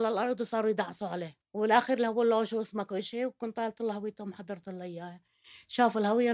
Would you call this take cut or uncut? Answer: cut